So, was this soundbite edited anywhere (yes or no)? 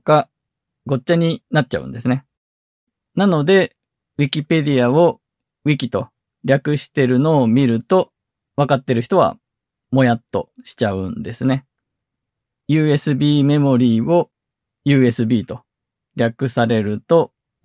no